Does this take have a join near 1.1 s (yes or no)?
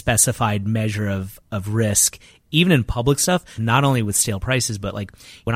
no